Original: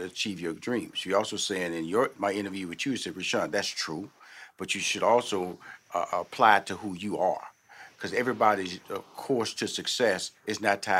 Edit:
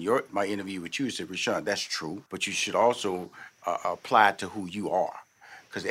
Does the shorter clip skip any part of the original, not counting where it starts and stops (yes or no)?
yes